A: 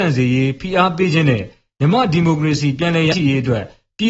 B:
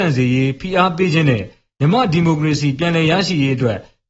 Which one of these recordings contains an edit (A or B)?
A